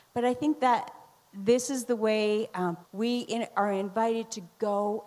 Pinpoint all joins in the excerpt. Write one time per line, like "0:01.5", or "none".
0:02.8